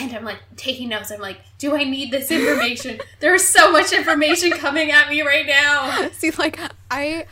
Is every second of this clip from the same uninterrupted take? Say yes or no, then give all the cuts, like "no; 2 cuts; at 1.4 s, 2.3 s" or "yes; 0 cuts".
yes; 0 cuts